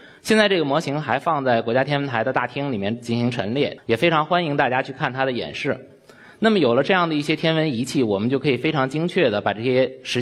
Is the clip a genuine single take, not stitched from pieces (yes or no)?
no